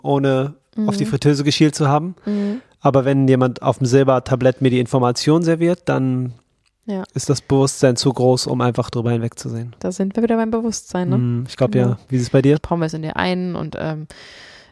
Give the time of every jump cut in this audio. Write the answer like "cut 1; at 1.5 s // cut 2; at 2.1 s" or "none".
cut 1; at 12.6 s